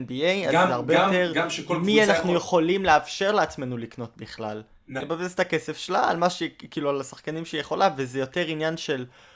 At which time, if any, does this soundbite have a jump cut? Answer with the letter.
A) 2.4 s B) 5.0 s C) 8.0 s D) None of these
B